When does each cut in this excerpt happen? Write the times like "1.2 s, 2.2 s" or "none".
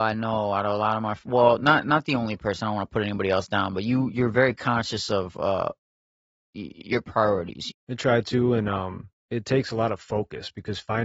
7.7 s, 9.2 s